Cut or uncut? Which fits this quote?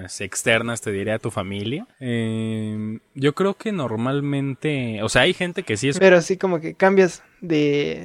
cut